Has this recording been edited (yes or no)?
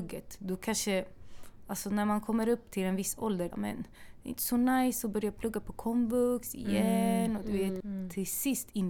yes